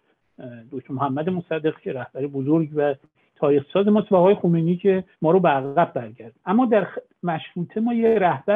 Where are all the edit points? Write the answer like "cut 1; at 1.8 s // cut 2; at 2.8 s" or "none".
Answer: cut 1; at 5.1 s // cut 2; at 6.4 s